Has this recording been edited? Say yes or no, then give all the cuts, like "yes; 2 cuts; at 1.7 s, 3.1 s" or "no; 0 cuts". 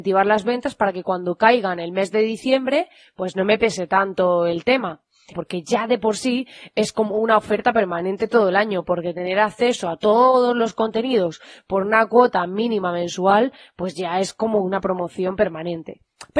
yes; 1 cut; at 5.3 s